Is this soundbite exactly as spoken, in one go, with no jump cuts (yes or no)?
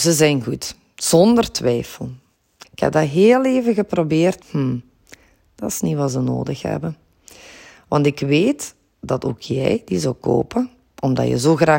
no